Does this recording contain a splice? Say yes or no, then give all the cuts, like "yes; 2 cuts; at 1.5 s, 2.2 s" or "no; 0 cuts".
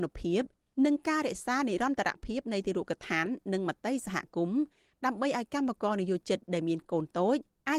no; 0 cuts